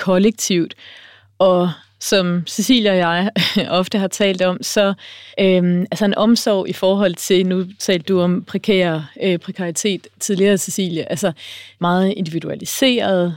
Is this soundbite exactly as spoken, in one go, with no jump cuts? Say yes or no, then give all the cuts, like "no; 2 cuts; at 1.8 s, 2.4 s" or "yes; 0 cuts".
no; 2 cuts; at 5.3 s, 11.8 s